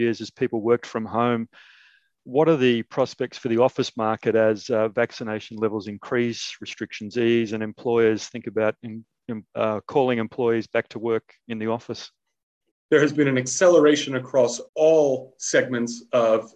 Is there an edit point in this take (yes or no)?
yes